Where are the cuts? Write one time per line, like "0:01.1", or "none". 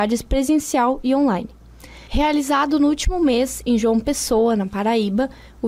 0:02.1